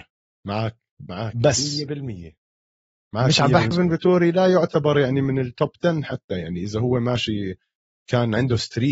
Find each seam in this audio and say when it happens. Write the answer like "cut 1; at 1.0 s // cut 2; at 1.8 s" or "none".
cut 1; at 3.7 s